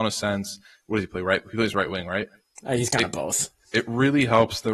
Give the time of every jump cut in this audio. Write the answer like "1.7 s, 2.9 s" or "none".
2.6 s